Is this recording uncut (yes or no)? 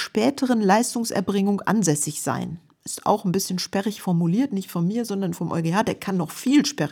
yes